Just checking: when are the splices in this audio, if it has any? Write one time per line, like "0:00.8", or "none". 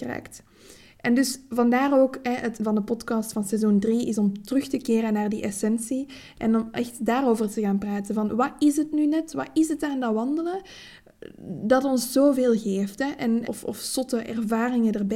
0:02.6
0:13.4